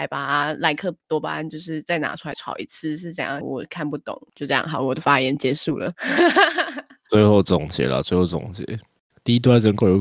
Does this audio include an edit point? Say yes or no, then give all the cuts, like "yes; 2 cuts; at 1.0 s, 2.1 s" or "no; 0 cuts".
yes; 1 cut; at 3.4 s